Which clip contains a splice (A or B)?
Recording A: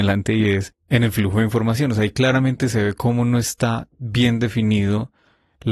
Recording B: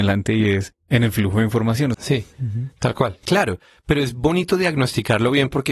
B